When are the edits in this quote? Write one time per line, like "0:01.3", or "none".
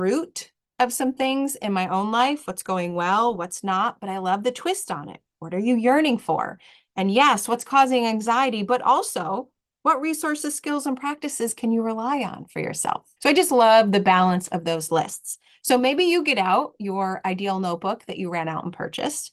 0:13.2